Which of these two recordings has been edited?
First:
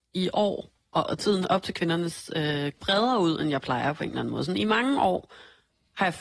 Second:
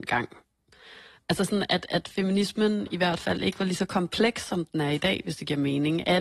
first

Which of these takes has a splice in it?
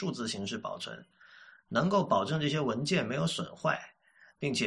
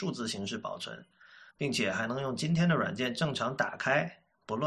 second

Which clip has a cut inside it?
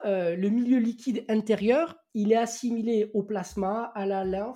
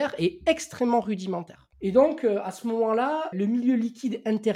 second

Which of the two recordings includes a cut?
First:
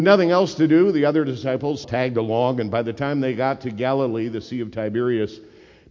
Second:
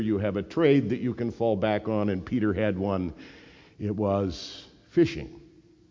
first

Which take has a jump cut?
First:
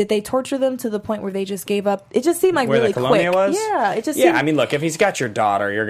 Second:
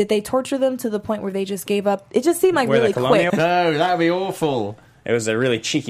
second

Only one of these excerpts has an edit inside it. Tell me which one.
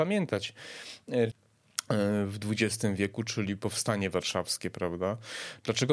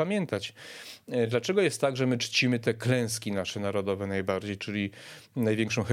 first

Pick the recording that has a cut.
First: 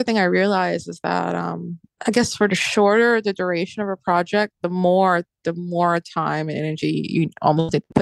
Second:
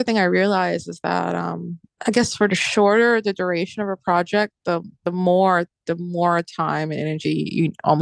first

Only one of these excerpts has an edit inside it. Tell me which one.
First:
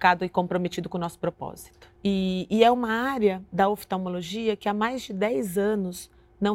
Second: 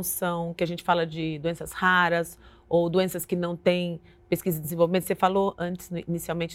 first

